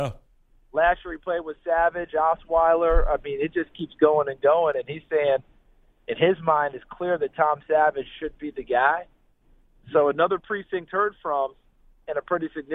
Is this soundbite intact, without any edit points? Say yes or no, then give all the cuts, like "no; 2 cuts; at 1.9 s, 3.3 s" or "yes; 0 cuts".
yes; 0 cuts